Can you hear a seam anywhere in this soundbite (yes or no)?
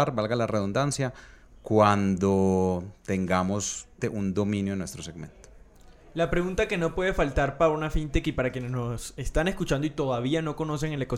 yes